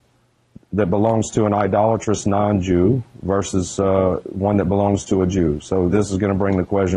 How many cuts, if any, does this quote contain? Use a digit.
1